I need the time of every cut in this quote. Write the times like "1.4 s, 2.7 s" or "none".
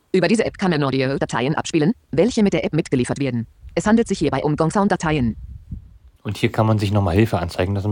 6.2 s